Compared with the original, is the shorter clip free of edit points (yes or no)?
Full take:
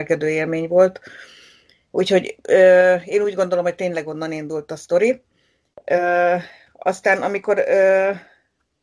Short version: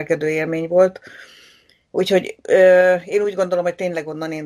yes